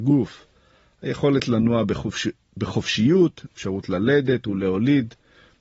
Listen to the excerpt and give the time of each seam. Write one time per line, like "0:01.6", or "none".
0:03.5